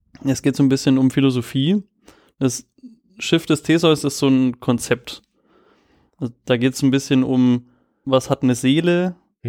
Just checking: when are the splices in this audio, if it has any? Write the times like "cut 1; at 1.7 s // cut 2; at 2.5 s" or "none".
cut 1; at 8.0 s